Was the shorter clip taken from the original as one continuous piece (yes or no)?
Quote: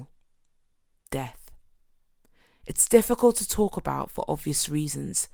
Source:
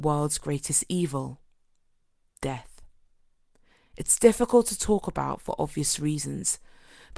yes